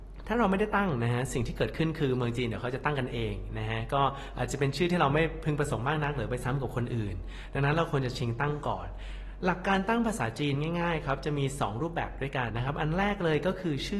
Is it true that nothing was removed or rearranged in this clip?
no; 1 cut; at 12.5 s

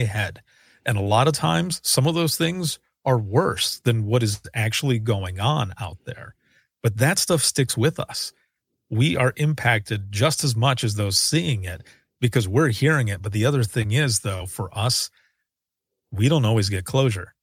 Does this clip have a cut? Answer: no; 0 cuts

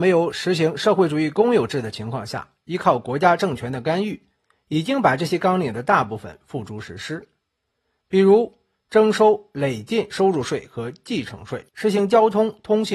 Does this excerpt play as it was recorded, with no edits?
no; 1 cut; at 11.7 s

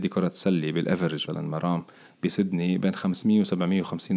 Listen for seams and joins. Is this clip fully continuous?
no; 1 cut; at 1.3 s

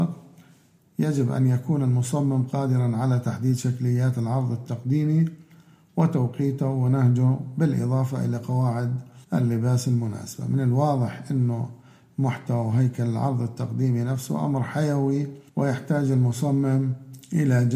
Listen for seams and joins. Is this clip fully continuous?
no; 2 cuts; at 9.2 s, 15.5 s

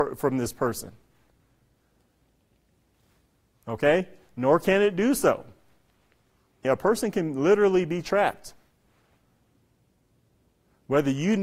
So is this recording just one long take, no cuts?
no; 1 cut; at 6.6 s

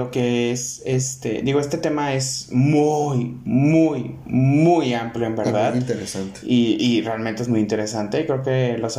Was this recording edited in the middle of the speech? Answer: no; 0 cuts

